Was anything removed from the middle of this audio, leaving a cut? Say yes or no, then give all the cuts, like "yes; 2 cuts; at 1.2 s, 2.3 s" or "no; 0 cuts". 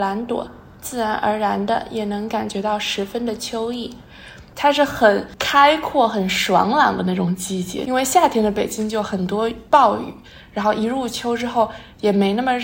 yes; 1 cut; at 4.5 s